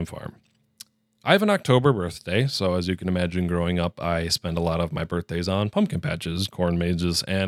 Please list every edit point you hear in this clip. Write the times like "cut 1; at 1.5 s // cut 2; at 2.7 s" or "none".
none